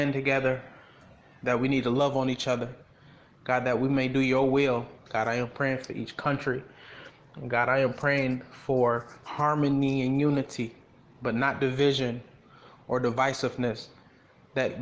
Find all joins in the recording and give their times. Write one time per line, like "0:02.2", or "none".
0:05.1